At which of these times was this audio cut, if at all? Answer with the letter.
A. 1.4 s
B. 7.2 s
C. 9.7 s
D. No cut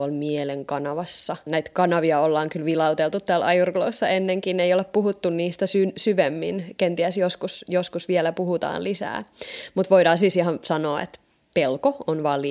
D